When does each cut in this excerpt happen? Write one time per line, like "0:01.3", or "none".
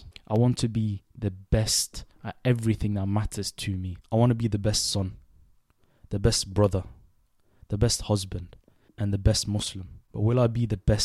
0:08.9